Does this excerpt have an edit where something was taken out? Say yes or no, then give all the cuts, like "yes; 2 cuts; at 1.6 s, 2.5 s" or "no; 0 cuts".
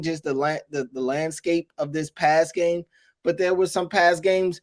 no; 0 cuts